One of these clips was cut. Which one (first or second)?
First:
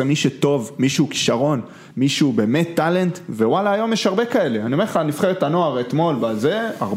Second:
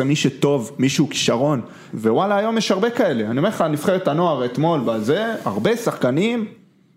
second